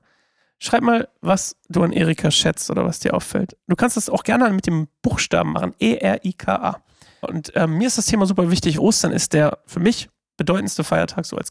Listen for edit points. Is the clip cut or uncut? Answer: cut